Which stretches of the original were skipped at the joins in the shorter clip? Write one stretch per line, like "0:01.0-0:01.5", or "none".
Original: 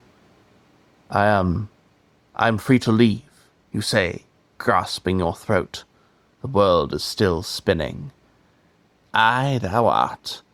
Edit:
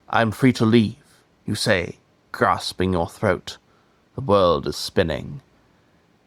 0:07.0-0:07.4